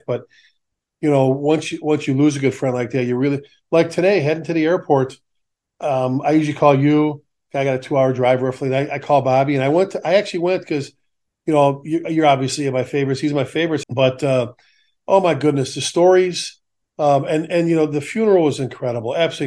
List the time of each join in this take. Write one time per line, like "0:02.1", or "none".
0:13.8